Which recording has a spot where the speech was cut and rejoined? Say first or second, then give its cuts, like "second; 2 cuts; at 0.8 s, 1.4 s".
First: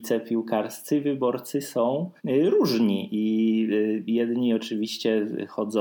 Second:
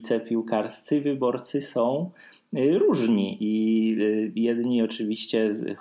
first; 1 cut; at 2.2 s